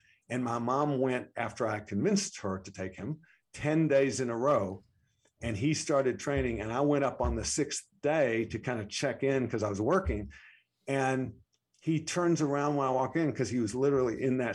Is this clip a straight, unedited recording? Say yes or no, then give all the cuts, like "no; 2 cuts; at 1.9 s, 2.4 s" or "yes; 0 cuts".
yes; 0 cuts